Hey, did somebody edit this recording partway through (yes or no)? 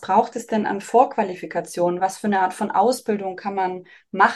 no